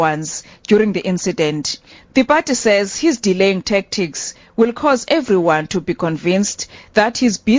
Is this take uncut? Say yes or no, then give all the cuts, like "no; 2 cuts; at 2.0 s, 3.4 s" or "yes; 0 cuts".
yes; 0 cuts